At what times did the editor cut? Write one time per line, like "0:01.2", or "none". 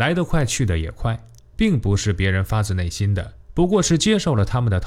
0:01.6
0:03.4